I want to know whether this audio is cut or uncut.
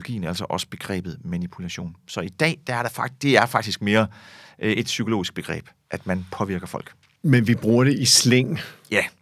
uncut